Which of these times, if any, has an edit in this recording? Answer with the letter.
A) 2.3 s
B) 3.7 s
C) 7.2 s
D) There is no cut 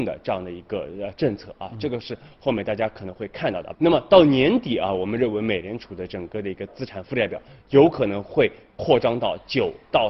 B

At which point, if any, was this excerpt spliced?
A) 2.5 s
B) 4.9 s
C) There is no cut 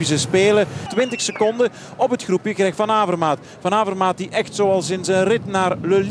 C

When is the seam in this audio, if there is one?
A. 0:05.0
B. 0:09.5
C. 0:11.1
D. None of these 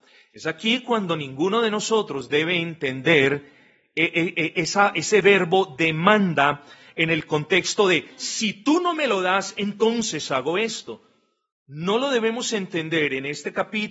D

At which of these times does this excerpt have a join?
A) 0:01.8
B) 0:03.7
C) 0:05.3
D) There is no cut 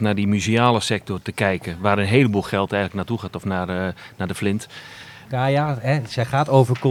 C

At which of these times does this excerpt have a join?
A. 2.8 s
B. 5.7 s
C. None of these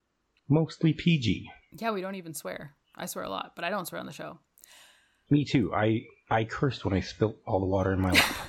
A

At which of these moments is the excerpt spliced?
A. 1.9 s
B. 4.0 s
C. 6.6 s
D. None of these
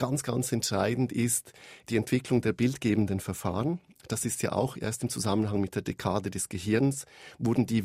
A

